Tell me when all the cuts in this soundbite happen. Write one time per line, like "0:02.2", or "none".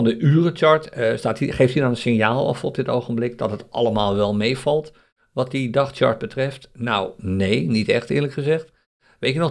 none